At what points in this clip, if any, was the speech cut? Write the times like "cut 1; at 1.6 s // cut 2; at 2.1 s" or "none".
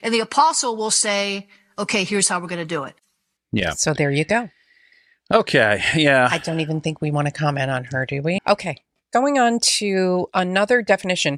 cut 1; at 8.4 s